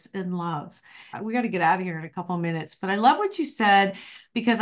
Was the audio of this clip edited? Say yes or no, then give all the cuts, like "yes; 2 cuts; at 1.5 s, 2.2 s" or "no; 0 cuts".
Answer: yes; 1 cut; at 1.1 s